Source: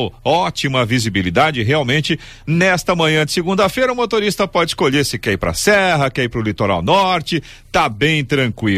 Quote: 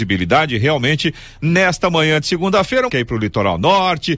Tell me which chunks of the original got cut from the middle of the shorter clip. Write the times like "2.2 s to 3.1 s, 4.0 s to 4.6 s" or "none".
3.9 s to 6.1 s